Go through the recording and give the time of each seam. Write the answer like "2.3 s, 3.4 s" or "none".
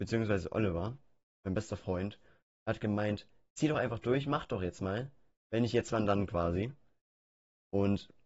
none